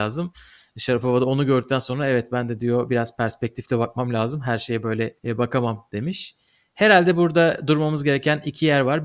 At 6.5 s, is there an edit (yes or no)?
no